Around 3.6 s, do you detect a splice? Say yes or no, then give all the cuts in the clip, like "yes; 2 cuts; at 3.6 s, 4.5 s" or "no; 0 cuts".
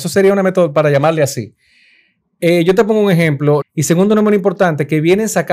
yes; 1 cut; at 3.6 s